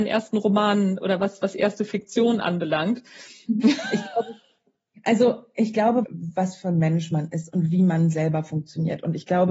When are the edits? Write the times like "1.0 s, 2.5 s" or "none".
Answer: 3.6 s, 6.0 s